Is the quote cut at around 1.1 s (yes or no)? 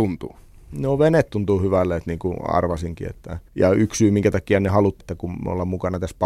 no